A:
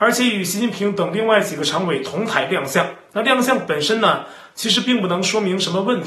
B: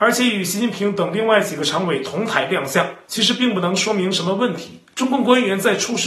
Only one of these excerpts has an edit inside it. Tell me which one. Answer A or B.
B